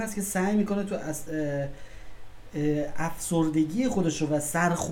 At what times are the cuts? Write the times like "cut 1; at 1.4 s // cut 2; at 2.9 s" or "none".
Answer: cut 1; at 1.3 s